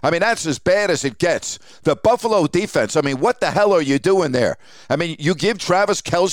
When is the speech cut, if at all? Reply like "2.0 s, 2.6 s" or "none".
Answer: none